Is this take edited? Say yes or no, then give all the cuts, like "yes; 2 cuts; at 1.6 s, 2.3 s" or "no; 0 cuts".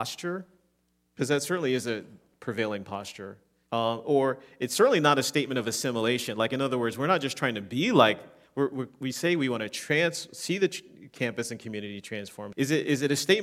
yes; 2 cuts; at 3.7 s, 12.5 s